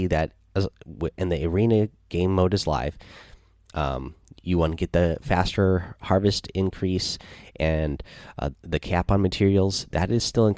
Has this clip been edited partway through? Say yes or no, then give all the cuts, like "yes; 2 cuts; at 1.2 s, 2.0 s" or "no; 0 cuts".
yes; 2 cuts; at 3.7 s, 8.5 s